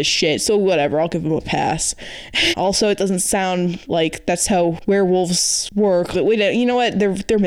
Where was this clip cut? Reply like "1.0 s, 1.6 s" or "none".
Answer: 2.5 s, 6.1 s